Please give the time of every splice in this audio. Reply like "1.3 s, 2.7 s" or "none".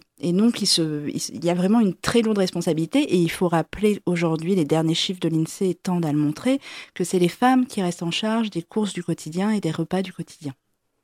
none